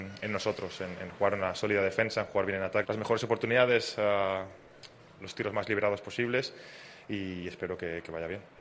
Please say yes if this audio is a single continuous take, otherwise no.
no